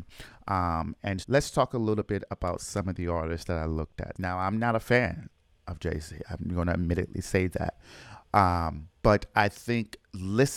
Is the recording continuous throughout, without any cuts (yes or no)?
no